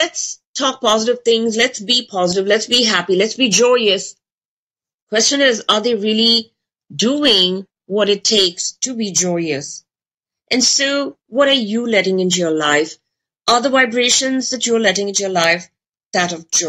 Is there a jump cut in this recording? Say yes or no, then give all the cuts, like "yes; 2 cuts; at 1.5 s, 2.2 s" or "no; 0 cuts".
no; 0 cuts